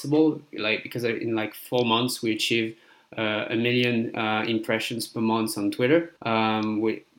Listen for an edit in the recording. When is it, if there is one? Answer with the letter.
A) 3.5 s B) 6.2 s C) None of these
B